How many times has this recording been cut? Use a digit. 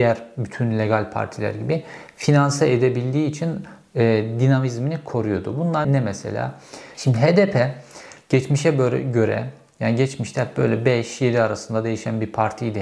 2